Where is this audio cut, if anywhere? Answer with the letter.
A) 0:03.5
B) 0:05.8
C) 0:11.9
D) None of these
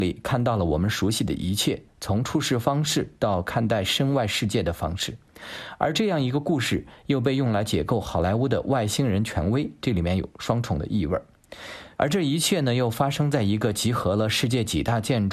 C